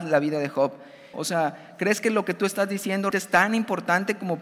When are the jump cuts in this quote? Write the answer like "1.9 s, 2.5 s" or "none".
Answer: 1.1 s, 3.1 s